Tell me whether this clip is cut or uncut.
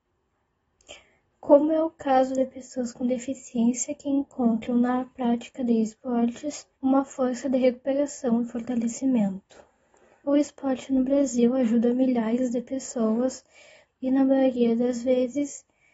cut